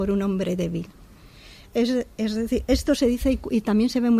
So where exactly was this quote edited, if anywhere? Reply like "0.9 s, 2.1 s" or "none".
none